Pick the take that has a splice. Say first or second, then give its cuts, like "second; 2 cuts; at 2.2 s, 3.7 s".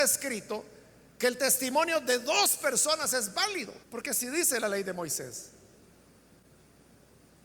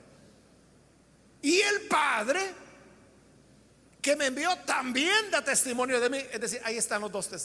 first; 1 cut; at 3.8 s